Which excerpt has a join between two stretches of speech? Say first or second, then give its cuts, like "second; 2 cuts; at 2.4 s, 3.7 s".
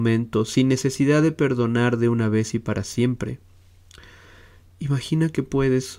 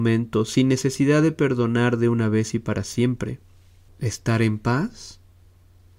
second; 1 cut; at 3.9 s